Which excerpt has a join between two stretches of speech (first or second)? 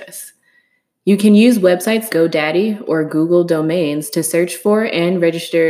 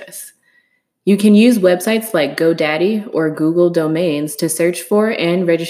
first